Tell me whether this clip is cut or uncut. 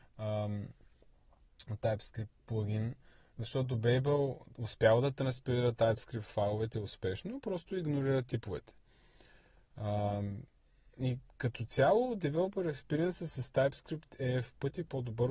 uncut